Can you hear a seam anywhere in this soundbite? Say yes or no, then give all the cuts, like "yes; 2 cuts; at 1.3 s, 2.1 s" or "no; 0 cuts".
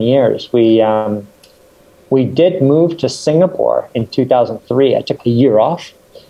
yes; 1 cut; at 5.2 s